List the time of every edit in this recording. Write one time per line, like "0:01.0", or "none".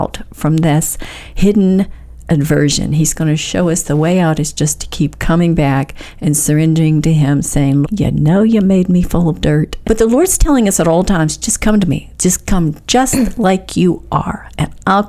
0:07.8
0:09.8